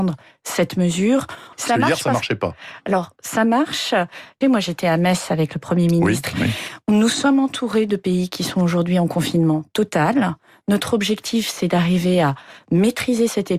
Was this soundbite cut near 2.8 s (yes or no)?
no